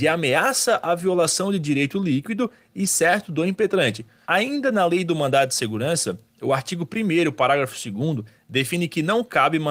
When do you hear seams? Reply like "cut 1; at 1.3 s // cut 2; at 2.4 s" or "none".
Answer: cut 1; at 4.2 s